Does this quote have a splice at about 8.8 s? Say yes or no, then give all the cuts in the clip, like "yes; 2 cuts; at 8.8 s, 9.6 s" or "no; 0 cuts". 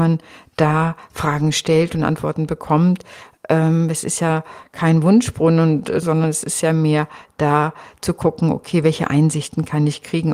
no; 1 cut; at 6.0 s